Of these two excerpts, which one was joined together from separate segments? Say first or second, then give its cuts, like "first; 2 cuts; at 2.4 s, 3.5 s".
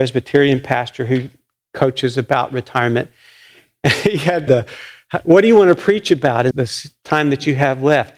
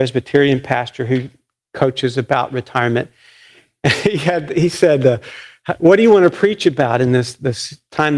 first; 2 cuts; at 4.5 s, 6.5 s